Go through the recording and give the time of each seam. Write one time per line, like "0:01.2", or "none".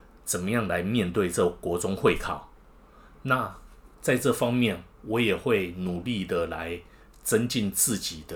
0:03.9